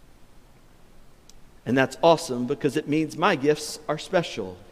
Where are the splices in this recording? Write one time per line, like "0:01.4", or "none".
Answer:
0:01.6